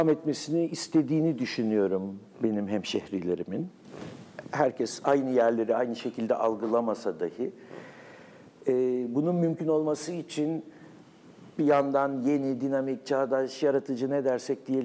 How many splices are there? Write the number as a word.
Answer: zero